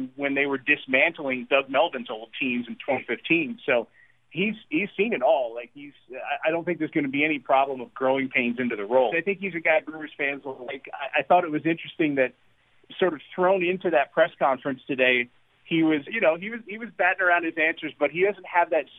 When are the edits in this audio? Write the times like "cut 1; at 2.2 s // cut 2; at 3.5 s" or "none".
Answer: cut 1; at 9.1 s // cut 2; at 16.1 s